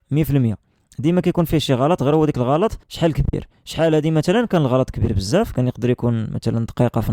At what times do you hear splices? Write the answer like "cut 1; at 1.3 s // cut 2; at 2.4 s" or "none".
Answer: cut 1; at 2.8 s